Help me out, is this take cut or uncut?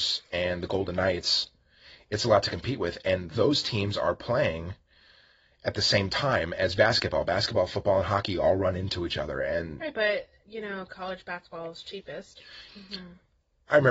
cut